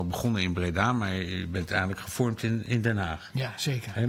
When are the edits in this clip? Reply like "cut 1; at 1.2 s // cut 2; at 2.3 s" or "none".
none